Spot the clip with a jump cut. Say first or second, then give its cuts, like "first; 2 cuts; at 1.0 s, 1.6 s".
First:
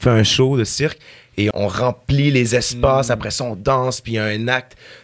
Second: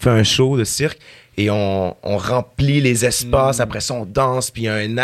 first; 1 cut; at 1.5 s